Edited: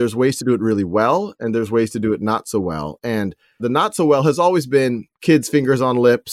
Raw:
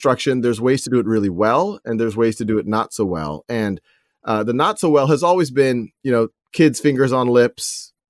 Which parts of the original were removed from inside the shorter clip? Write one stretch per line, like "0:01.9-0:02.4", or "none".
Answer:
0:04.1-0:04.4
0:05.9-0:06.4